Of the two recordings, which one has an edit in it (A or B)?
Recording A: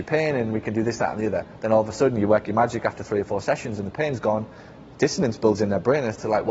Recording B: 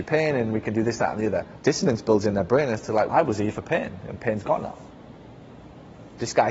B